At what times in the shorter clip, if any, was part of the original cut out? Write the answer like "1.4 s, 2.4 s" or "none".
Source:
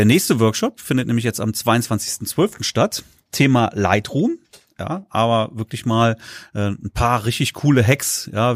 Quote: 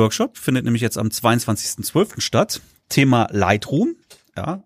none

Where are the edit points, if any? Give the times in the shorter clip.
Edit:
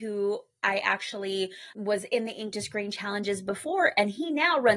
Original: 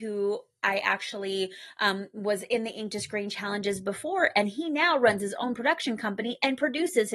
1.7 s

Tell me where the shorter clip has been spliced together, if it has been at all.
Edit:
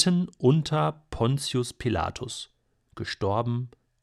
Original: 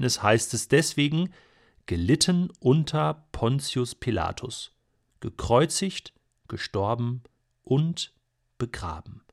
2.9 s

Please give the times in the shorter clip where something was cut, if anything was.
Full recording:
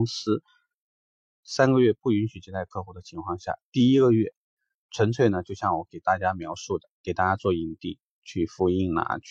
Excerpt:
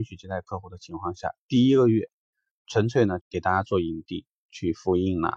3.2 s

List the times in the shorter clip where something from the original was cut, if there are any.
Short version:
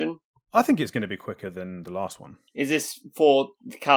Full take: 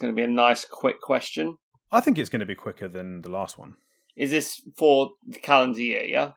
2.5 s

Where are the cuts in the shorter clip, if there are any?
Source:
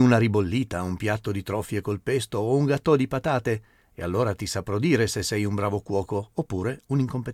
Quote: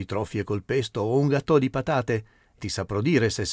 2.6 s

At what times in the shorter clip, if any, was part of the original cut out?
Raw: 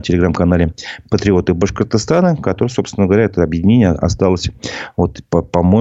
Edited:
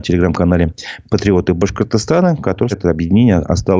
2.7 s

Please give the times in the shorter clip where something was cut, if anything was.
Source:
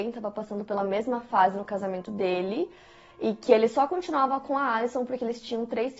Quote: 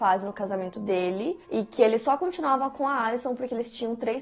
1.4 s

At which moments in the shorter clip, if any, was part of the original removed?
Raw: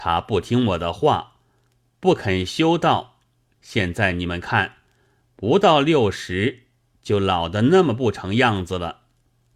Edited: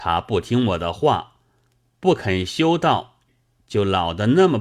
3.3 s

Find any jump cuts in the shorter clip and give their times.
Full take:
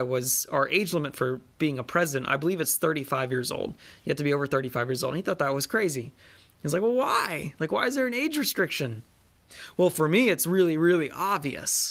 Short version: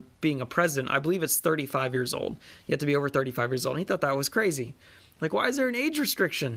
5.2 s

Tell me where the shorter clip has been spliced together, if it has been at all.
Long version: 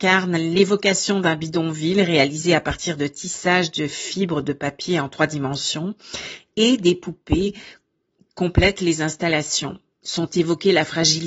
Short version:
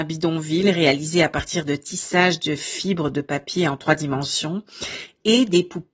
none

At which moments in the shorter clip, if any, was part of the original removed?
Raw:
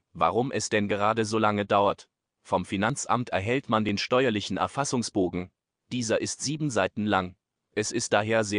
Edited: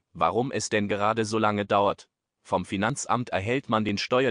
none

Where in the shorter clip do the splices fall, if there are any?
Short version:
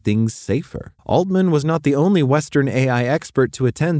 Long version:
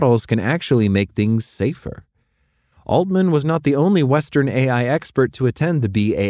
1.0 s

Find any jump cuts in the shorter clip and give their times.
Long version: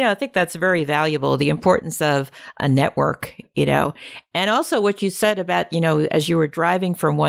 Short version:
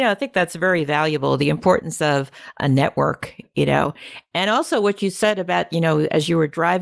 none

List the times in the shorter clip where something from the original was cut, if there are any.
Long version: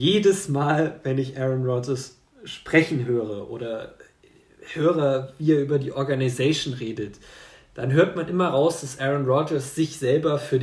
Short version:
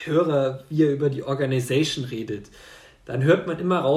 none

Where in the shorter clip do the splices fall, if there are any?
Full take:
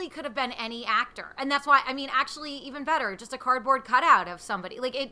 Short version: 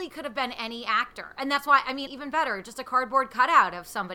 2.1 s

